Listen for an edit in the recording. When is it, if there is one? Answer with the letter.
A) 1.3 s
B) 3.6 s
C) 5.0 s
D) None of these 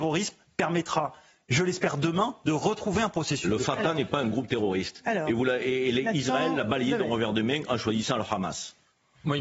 D